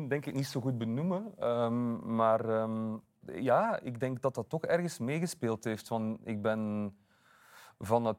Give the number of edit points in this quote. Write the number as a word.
one